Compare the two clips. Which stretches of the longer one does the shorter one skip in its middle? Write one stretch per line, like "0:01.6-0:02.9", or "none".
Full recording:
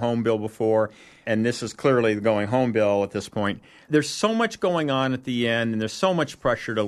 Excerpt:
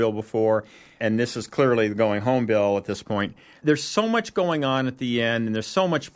none